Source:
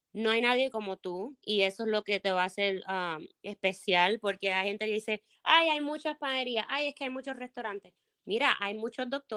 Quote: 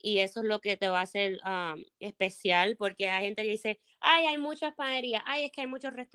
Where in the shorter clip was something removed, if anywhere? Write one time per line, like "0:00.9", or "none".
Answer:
none